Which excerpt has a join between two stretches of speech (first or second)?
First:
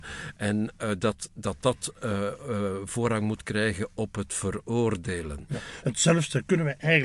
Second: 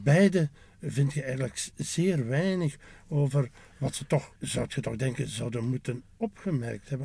second